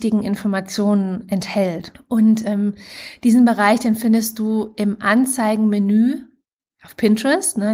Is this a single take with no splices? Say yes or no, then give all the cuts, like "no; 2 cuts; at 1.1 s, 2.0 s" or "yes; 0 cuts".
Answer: no; 1 cut; at 1.9 s